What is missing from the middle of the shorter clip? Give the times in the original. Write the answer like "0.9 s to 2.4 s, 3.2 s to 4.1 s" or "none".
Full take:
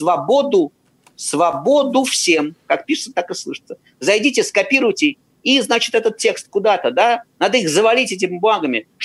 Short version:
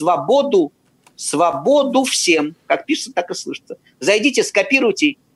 none